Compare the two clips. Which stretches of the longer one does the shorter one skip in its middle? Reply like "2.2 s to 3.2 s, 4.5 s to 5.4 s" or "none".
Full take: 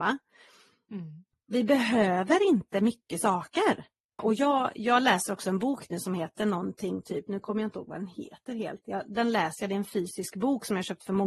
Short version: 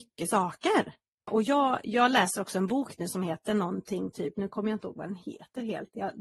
none